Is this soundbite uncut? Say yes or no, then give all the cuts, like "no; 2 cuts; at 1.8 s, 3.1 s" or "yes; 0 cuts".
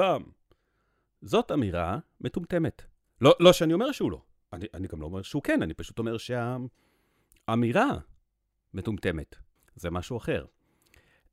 no; 1 cut; at 9.6 s